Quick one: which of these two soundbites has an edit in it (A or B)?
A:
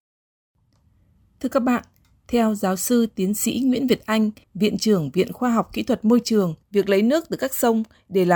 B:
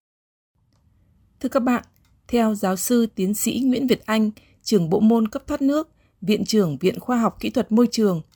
A